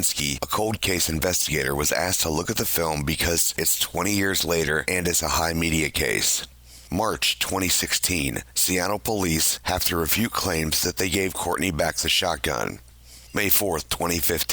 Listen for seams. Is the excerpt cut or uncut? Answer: cut